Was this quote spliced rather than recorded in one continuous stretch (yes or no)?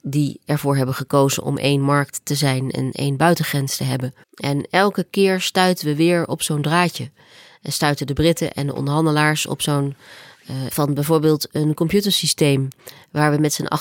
yes